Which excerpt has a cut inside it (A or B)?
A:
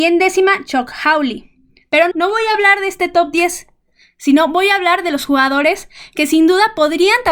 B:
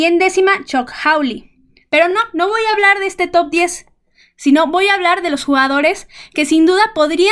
A